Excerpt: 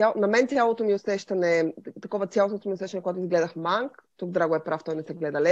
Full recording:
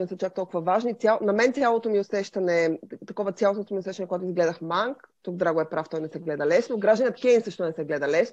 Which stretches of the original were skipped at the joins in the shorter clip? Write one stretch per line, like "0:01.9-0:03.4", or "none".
none

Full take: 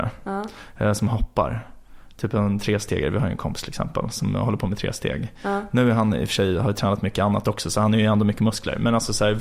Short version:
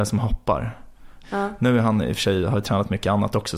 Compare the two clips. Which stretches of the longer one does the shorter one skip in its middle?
0:02.1-0:05.4

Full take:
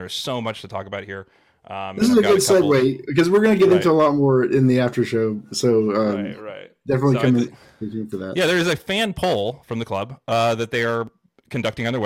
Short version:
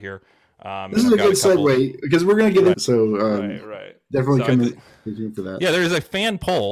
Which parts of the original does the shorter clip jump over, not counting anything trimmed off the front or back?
0:03.8-0:05.5

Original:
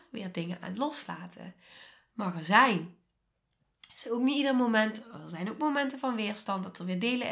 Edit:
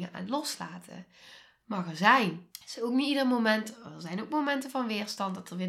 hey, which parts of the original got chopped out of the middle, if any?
0:03.0-0:03.8

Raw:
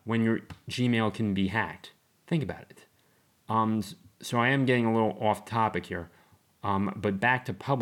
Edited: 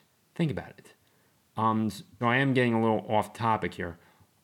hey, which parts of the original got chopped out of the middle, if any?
0:04.1-0:04.3

